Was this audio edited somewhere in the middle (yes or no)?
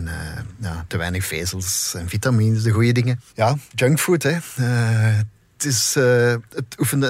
yes